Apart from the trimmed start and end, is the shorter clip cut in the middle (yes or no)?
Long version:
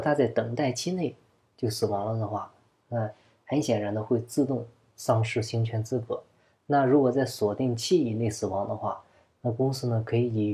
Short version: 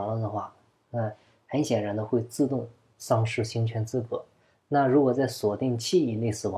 no